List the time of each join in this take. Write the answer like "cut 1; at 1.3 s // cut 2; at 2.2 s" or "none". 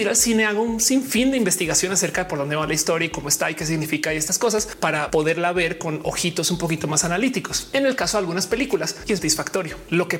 cut 1; at 9.2 s